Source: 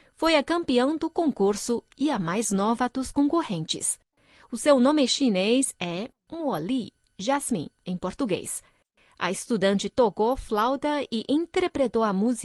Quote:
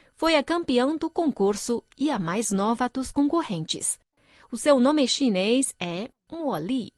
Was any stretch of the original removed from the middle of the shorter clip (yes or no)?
no